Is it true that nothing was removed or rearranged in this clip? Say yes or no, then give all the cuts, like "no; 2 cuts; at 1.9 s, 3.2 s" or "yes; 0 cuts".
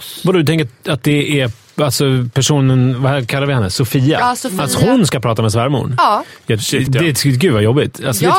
no; 1 cut; at 6.9 s